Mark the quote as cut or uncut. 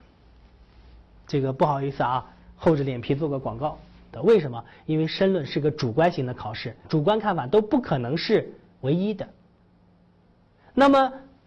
cut